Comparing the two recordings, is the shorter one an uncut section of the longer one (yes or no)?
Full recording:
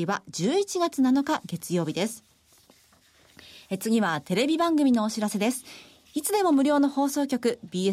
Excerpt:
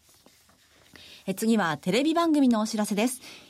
yes